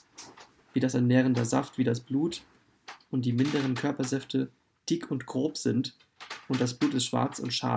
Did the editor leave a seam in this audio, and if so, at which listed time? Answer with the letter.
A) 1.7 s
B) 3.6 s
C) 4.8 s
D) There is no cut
C